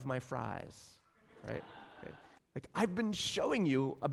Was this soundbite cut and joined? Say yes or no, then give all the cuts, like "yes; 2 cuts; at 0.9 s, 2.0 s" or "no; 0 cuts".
yes; 1 cut; at 2.4 s